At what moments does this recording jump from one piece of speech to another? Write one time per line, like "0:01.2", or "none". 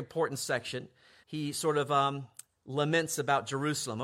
0:01.2